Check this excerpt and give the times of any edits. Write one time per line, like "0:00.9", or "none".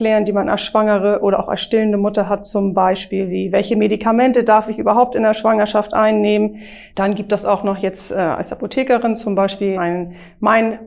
0:06.9
0:09.7